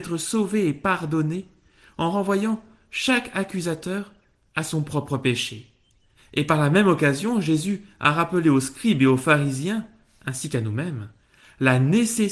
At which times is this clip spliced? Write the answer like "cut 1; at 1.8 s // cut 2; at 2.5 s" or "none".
cut 1; at 6.2 s